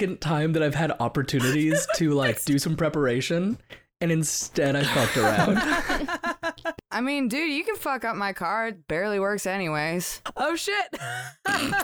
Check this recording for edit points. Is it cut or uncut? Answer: cut